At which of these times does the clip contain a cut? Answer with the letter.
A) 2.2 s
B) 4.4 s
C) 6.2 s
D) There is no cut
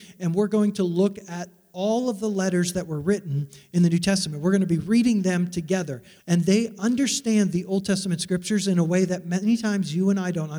C